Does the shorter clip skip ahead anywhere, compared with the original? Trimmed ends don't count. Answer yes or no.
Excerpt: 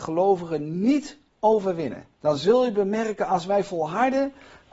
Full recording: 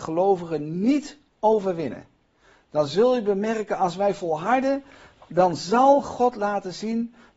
yes